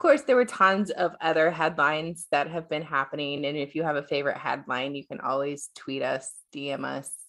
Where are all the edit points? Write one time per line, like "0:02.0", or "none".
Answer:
none